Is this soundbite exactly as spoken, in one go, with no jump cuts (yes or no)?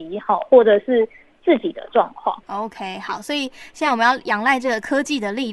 yes